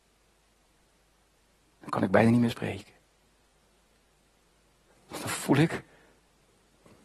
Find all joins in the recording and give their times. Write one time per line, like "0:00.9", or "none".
none